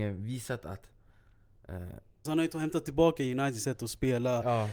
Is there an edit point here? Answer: yes; 1 cut; at 2.3 s

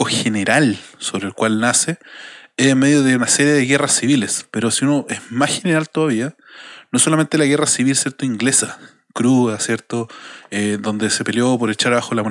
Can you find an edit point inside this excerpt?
no; 0 cuts

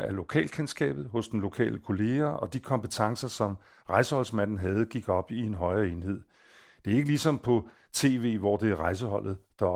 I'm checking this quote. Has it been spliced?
no; 0 cuts

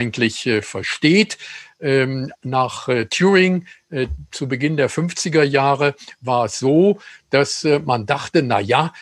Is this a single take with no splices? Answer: yes; 0 cuts

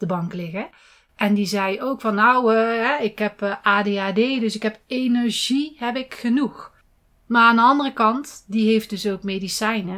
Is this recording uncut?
yes; 0 cuts

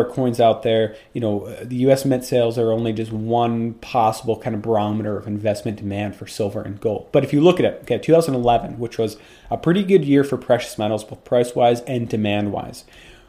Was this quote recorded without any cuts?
yes; 0 cuts

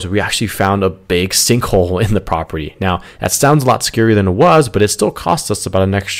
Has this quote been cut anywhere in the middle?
no; 0 cuts

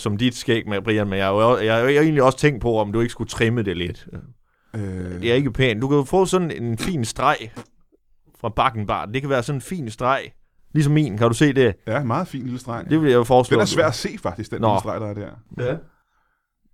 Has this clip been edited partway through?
no; 0 cuts

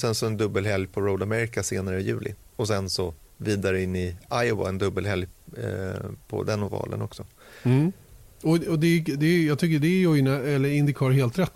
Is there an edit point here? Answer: no; 0 cuts

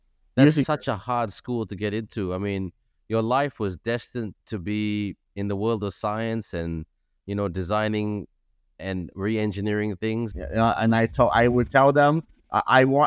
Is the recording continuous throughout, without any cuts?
no; 2 cuts; at 4.4 s, 10.3 s

